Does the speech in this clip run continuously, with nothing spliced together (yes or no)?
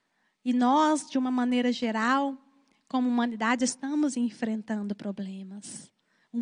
yes